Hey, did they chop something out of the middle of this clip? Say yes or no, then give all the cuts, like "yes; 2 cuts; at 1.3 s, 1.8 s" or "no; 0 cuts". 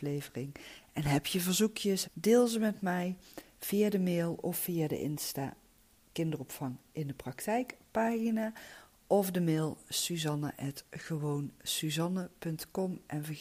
yes; 1 cut; at 2.0 s